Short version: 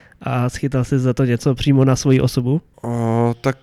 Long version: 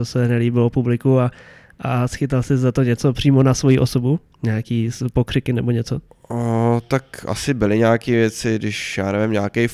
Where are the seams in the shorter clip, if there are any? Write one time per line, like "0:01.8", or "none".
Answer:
0:02.7